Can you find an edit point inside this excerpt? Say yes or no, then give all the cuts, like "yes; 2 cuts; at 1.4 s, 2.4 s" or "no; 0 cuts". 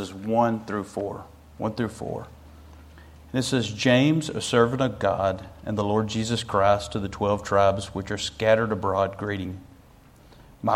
no; 0 cuts